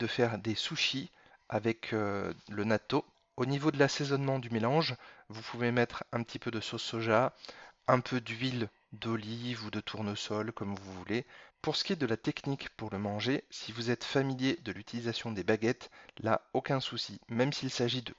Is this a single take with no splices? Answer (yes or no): no